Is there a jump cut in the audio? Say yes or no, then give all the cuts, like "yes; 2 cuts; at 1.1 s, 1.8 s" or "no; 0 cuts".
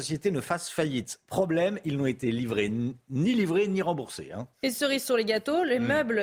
no; 0 cuts